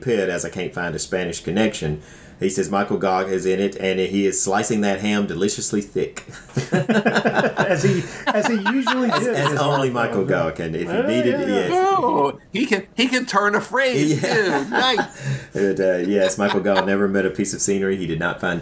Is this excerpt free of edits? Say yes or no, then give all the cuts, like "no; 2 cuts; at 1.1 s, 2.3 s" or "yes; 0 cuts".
yes; 0 cuts